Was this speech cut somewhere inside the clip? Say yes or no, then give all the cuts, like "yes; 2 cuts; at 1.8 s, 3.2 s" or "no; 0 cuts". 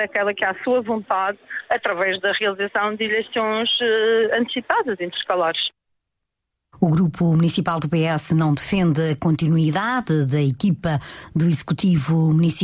no; 0 cuts